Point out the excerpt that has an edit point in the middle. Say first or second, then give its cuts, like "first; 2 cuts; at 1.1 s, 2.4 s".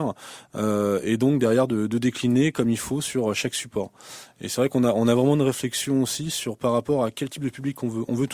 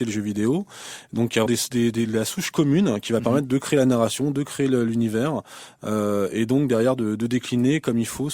second; 1 cut; at 1.5 s